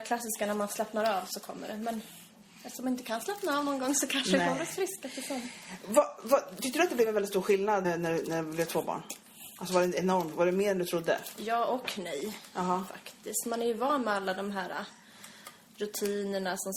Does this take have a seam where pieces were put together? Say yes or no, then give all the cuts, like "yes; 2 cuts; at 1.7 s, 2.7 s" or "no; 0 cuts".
yes; 1 cut; at 7.8 s